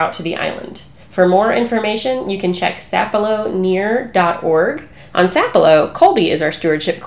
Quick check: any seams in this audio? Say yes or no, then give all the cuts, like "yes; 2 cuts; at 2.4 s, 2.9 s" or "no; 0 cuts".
yes; 2 cuts; at 1.0 s, 5.1 s